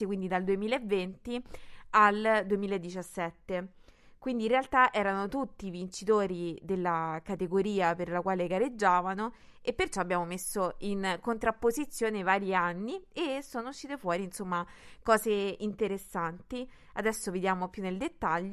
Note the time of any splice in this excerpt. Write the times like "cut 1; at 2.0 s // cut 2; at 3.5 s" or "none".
none